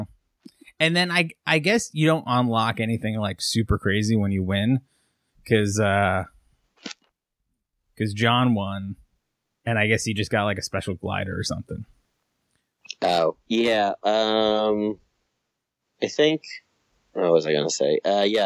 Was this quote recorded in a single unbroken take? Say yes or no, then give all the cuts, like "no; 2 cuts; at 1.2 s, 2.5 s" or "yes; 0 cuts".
yes; 0 cuts